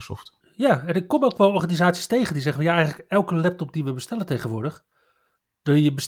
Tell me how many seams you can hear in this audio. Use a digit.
0